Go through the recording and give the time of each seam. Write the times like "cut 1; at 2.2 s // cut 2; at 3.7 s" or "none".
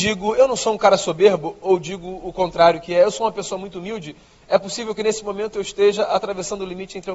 none